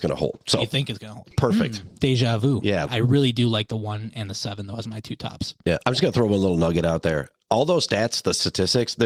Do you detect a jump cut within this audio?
yes; 2 cuts; at 1.3 s, 2.9 s

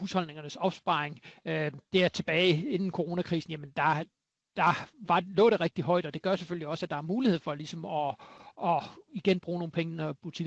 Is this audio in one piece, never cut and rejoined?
yes; 0 cuts

